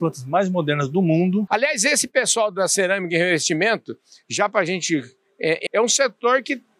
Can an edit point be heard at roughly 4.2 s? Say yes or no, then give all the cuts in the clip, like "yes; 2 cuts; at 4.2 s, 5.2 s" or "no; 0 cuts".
no; 2 cuts; at 1.5 s, 5.7 s